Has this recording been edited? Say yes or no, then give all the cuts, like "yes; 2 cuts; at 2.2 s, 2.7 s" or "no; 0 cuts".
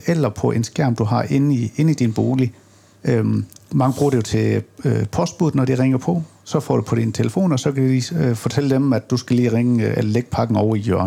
no; 0 cuts